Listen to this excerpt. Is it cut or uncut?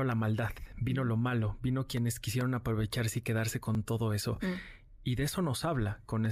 uncut